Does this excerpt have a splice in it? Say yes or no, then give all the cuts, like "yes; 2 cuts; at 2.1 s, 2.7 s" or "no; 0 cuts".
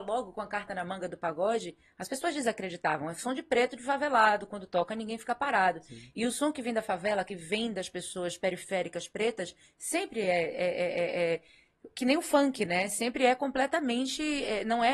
no; 0 cuts